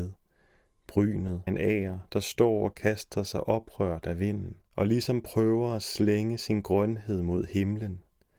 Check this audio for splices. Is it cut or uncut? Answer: cut